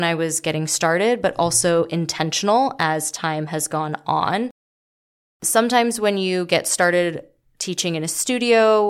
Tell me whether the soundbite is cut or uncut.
uncut